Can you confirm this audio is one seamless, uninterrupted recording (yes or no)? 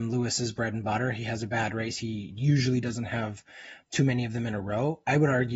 yes